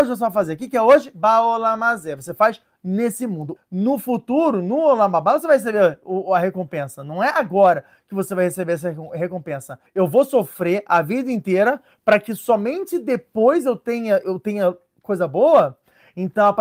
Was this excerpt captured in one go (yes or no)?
no